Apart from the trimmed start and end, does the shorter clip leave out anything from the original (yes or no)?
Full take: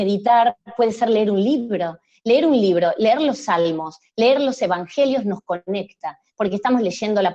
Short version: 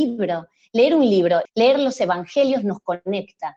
yes